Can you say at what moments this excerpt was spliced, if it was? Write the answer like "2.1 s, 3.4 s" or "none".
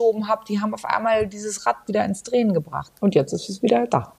2.9 s